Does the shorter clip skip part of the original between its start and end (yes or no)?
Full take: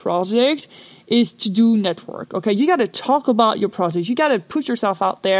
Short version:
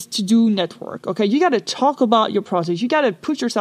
no